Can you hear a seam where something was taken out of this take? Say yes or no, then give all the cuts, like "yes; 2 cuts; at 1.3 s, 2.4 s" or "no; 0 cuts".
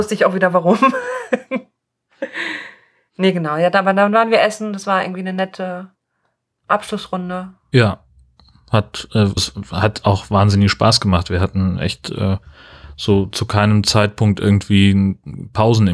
yes; 1 cut; at 9.4 s